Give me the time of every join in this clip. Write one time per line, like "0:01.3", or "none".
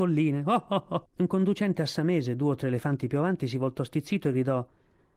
0:01.1